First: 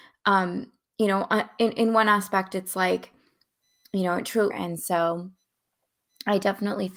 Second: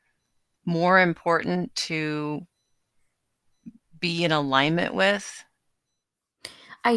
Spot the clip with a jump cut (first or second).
first